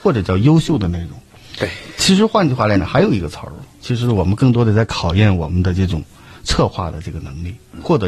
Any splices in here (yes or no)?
no